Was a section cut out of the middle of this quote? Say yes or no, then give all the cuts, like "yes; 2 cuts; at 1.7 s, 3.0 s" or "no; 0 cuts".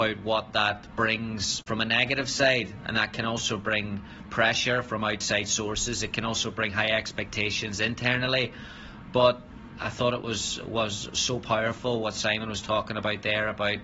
no; 0 cuts